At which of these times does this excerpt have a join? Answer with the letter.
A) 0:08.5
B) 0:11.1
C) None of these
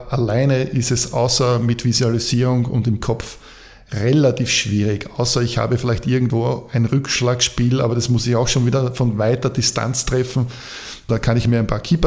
B